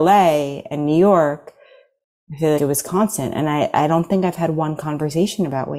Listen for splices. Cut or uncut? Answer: cut